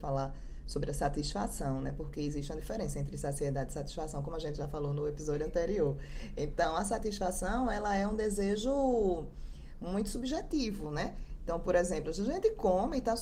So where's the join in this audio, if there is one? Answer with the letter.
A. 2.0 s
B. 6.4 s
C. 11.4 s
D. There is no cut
D